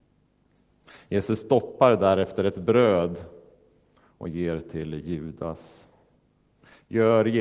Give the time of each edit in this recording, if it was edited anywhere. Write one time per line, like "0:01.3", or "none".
none